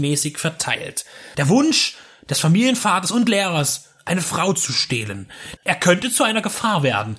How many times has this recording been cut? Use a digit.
2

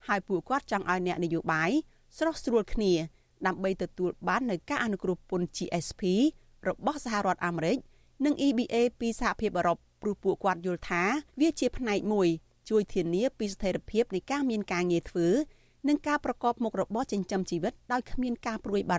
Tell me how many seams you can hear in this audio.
1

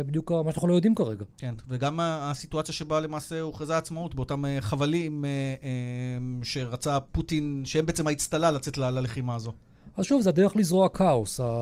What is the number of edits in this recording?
0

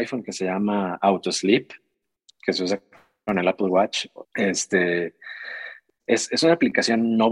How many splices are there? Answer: 2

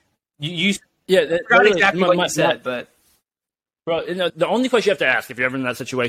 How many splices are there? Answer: 1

